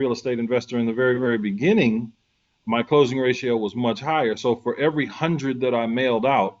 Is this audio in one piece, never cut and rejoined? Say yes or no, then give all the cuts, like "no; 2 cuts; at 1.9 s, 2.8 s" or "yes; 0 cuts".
yes; 0 cuts